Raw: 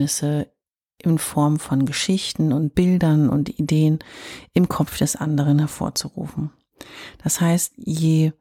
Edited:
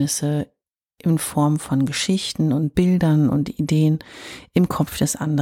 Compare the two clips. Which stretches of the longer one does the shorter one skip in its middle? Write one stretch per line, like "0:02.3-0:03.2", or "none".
none